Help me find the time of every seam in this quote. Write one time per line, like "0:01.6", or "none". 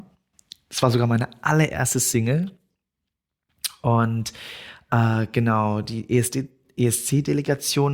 none